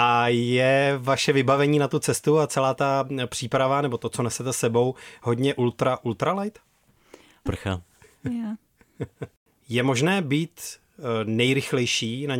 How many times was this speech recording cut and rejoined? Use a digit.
1